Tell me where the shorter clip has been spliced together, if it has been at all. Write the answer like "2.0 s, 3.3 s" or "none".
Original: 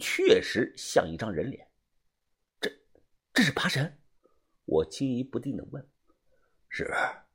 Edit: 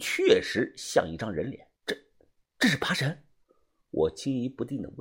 1.8 s